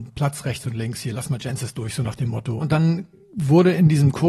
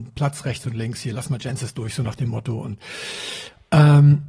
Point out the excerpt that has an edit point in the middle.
first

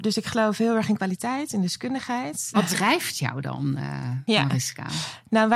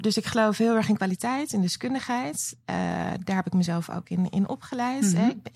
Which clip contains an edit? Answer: first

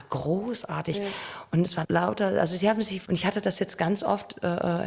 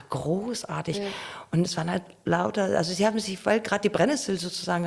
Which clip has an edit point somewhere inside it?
first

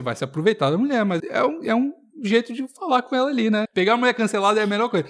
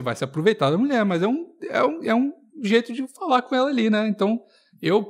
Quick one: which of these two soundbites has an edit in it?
first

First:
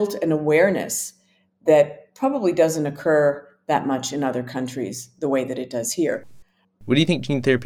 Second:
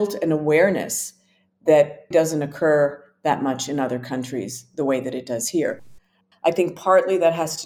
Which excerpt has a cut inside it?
second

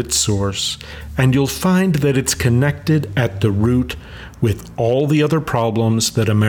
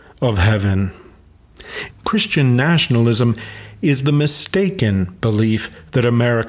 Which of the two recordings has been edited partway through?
second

